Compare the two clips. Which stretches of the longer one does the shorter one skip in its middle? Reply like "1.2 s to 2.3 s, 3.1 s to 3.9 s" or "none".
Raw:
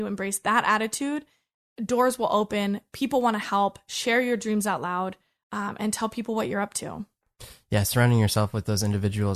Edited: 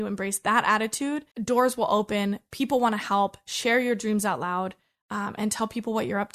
1.3 s to 1.7 s